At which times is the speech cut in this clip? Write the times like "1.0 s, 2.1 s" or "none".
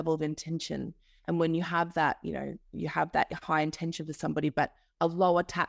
none